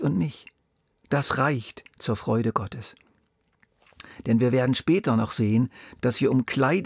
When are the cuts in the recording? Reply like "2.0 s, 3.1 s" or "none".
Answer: 0.9 s, 6.0 s